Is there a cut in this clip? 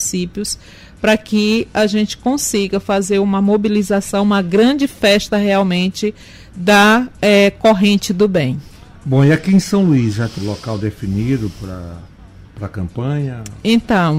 yes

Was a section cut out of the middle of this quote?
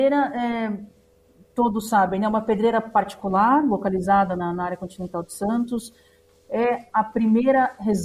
no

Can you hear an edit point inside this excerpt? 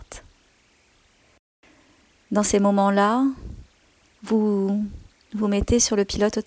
no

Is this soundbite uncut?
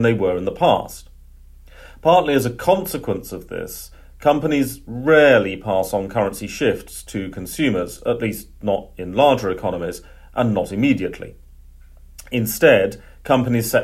yes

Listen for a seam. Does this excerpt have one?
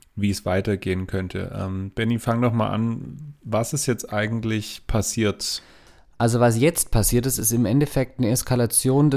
no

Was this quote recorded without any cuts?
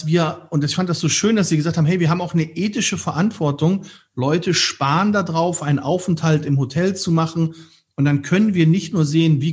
yes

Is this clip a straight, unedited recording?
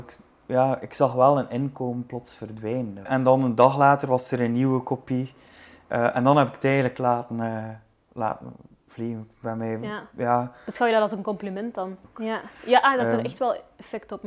no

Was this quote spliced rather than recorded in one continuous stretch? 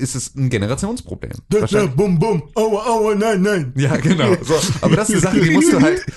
no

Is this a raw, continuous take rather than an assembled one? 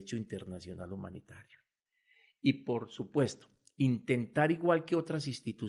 yes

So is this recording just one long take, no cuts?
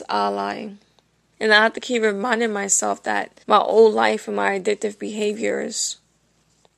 no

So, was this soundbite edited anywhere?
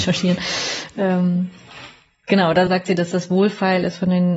yes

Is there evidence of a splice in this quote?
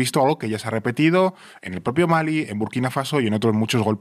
no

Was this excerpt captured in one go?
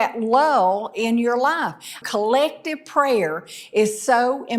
no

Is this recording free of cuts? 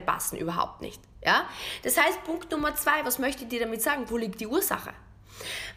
yes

